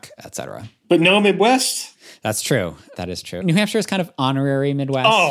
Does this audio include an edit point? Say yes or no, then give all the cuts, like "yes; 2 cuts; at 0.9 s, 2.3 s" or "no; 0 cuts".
yes; 1 cut; at 3.4 s